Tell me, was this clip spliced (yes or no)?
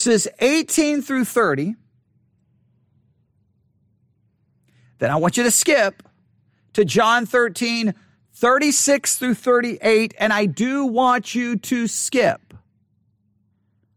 no